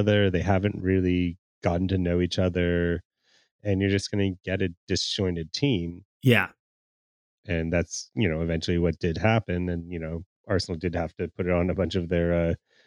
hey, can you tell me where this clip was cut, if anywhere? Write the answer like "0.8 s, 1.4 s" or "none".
6.1 s